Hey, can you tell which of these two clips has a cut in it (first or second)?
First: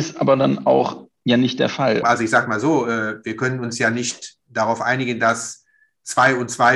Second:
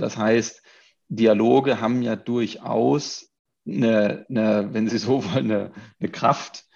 first